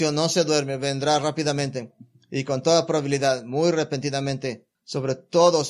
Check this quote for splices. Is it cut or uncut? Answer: cut